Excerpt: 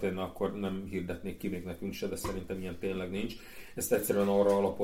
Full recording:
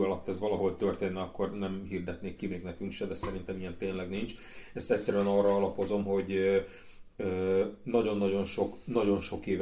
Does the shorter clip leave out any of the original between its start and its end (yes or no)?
no